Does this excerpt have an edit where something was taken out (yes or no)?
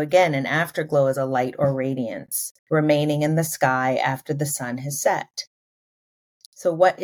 yes